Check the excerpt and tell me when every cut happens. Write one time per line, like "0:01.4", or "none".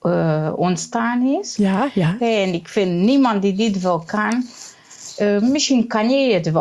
0:02.2